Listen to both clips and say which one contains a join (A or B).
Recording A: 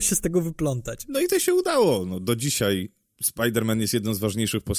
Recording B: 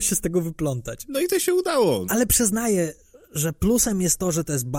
B